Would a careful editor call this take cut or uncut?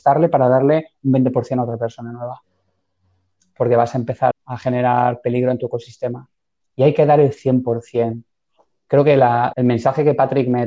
cut